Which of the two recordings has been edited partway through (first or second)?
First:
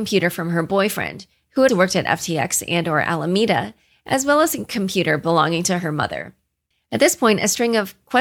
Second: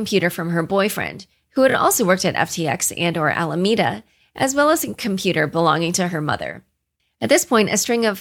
first